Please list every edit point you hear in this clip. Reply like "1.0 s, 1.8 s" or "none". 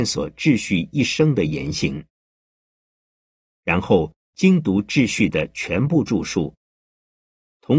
none